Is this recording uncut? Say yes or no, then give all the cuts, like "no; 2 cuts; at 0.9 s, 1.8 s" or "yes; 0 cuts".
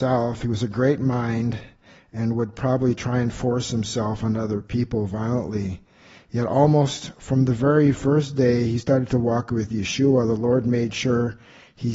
yes; 0 cuts